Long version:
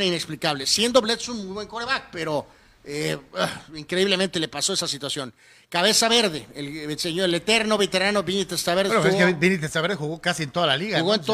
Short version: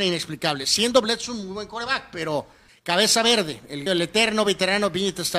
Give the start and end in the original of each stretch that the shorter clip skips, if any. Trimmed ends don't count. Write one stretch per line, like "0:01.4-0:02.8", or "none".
0:02.7-0:05.5
0:06.7-0:07.2